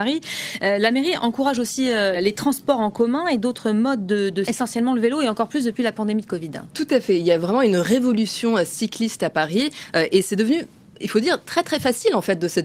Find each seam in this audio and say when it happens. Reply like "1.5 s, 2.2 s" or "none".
2.1 s, 4.5 s